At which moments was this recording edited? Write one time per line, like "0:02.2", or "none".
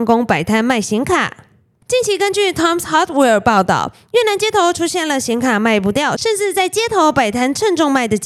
0:01.8